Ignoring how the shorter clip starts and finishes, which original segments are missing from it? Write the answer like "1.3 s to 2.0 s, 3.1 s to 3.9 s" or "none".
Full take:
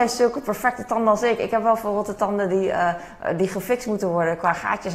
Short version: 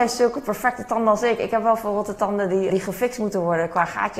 2.7 s to 3.4 s